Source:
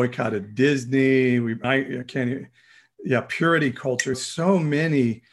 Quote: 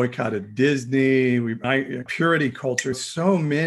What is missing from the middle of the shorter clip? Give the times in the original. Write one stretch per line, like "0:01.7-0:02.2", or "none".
0:02.1-0:03.3